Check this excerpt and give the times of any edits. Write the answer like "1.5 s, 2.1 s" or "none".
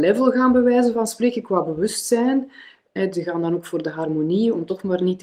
3.0 s